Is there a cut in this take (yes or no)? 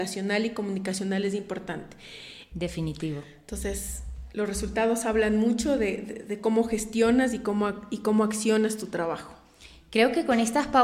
yes